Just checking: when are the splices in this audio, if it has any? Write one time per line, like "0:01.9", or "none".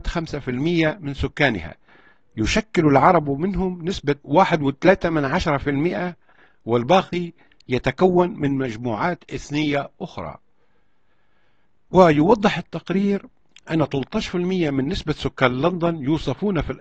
none